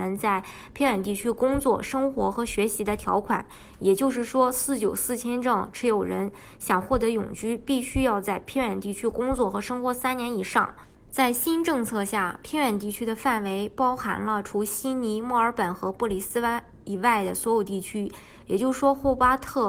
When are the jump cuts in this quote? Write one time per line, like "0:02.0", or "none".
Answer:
none